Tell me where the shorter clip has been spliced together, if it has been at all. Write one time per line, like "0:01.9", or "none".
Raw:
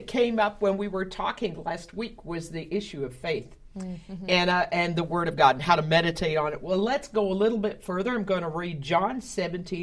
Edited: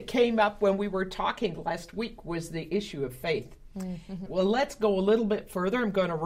0:04.3